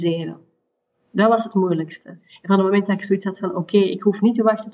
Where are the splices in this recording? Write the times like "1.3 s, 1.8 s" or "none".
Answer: none